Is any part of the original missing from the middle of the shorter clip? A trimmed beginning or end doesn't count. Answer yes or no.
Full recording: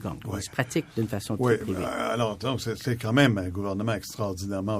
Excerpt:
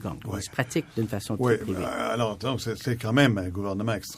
no